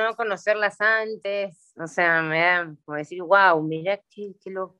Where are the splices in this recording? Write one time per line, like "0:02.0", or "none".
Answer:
none